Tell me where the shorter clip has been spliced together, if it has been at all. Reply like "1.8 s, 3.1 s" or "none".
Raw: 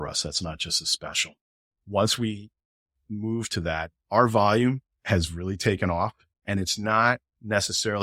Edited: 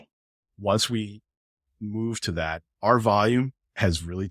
none